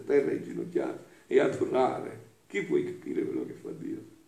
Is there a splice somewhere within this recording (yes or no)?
no